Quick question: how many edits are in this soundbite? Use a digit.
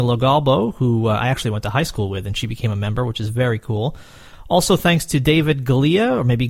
0